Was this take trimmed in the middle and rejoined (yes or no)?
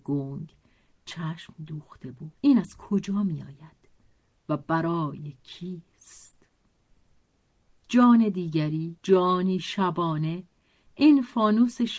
yes